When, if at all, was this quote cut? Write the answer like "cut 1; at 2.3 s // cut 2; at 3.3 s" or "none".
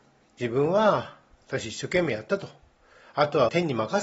none